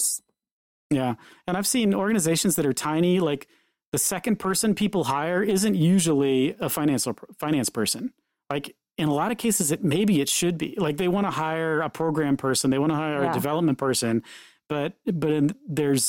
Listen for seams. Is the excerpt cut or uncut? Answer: uncut